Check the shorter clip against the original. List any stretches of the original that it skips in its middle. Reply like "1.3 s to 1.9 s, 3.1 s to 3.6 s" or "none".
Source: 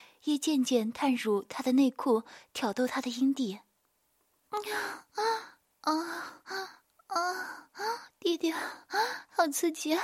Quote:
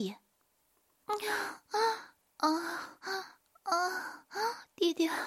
none

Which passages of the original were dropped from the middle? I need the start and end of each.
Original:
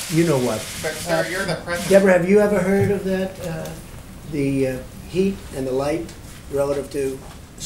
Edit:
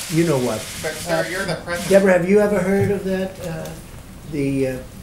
none

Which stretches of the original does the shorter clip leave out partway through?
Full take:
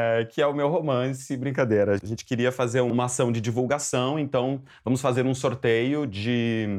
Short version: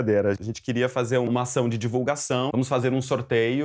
4.1 s to 4.8 s

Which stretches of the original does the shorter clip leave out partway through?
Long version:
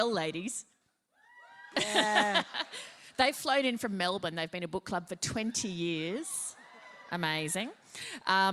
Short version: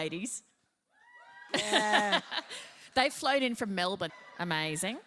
4.3 s to 6.8 s

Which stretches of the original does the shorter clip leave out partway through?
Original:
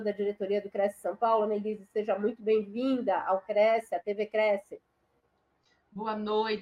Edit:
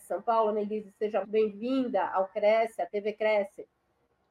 2.2 s to 2.4 s

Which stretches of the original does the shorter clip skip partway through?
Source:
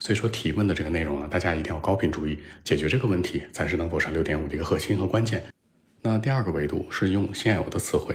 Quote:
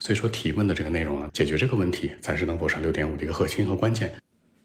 1.3 s to 2.6 s

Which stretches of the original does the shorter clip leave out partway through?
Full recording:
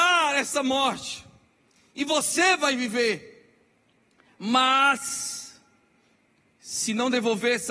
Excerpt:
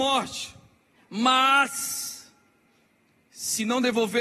1.6 s to 4.2 s

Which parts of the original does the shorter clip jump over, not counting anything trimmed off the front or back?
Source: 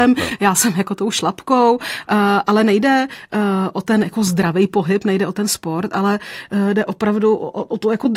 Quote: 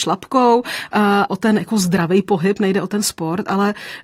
2.4 s to 3.7 s

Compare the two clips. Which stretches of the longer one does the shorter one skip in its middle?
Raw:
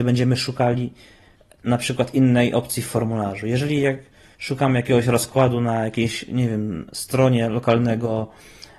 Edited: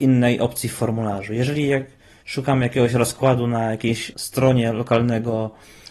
6.3 s to 6.9 s

